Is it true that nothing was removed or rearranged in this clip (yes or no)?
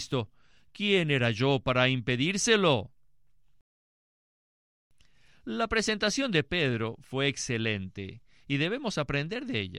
yes